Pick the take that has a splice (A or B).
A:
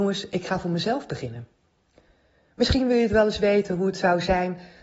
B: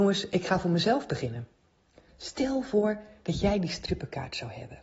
B